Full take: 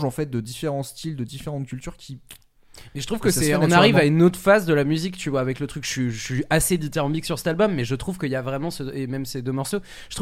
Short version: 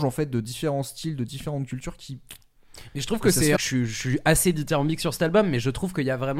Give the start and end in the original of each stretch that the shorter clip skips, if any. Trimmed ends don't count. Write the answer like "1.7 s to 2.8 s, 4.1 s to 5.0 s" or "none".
3.6 s to 5.8 s